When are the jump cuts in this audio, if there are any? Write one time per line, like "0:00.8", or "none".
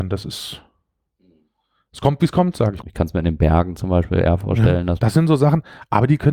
0:02.8
0:05.0